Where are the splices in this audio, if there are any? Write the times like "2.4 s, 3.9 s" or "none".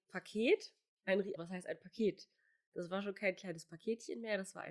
1.4 s